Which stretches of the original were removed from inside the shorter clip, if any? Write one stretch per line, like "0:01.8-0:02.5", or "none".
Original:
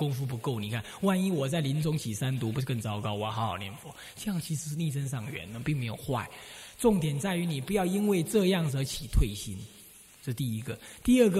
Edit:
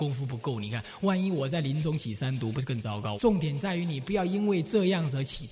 0:03.2-0:06.8